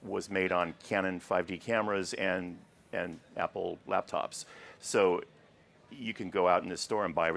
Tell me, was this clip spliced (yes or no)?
no